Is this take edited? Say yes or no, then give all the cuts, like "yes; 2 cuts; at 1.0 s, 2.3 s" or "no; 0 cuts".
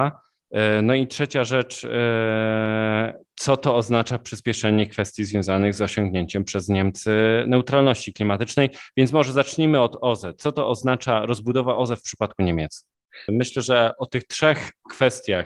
yes; 1 cut; at 13.3 s